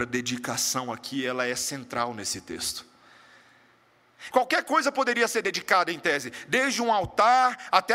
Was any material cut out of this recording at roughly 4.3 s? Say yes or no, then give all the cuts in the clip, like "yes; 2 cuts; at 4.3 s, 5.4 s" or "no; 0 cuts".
yes; 1 cut; at 4.3 s